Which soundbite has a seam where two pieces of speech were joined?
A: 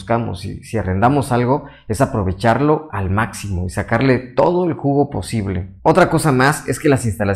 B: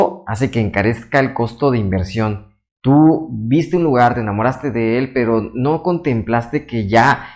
A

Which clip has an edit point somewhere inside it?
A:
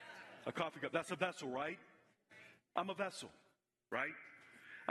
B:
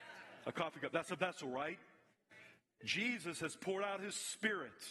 A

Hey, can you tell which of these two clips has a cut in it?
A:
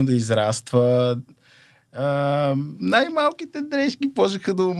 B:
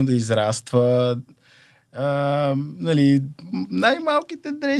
A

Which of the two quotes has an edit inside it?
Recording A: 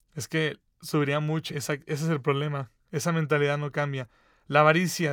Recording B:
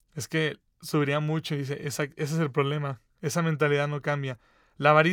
A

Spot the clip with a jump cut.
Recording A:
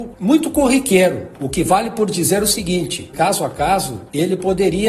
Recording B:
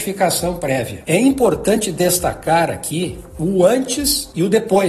A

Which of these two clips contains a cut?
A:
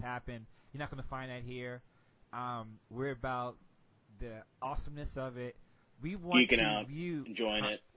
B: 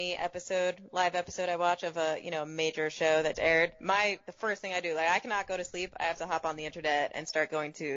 B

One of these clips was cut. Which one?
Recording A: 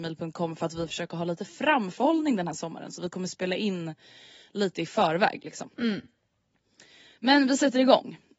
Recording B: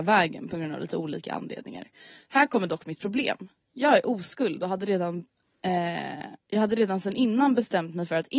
B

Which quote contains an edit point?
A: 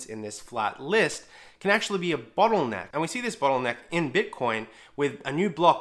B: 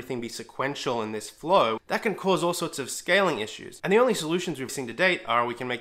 B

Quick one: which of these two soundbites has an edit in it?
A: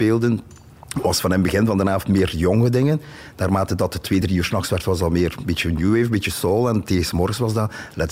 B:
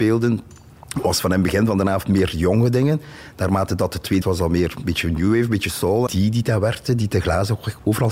B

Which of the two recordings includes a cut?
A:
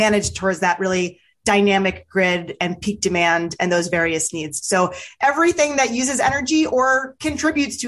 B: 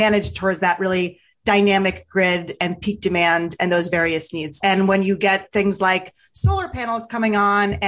B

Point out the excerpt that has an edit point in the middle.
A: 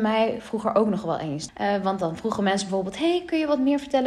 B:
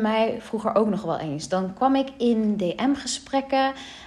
A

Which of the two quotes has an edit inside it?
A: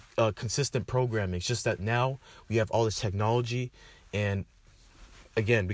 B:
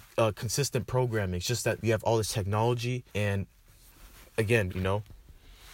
B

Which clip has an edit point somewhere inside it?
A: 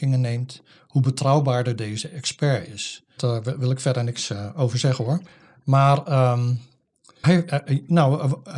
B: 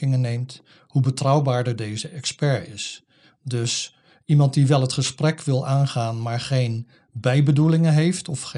A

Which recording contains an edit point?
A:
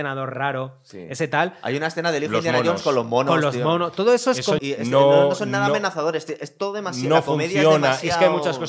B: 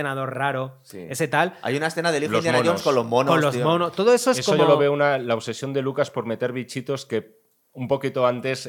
A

